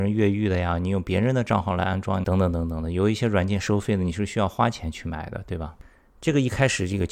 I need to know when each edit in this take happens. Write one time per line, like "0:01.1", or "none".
0:02.2